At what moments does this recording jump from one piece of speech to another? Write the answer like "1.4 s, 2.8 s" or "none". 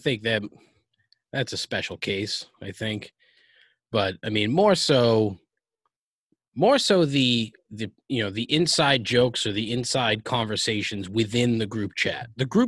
none